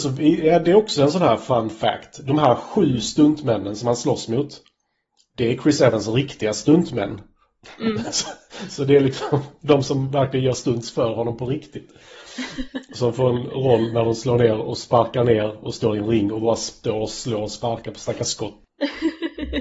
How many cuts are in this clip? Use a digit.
0